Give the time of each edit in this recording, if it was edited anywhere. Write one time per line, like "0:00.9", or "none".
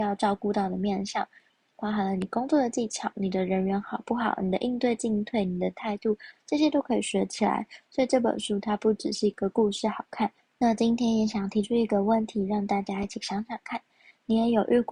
0:10.4